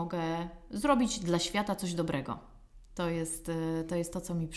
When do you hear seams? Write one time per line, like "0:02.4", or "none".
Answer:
none